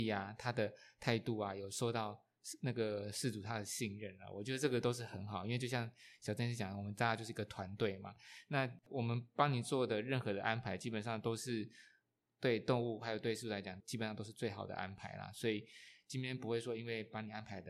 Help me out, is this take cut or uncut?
uncut